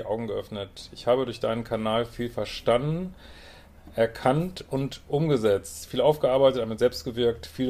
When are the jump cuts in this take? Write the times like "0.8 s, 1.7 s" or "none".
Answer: none